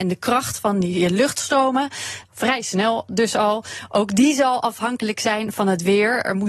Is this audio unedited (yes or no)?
no